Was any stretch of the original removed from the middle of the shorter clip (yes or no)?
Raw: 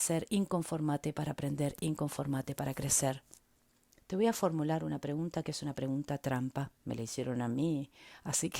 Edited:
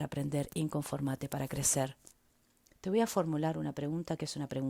no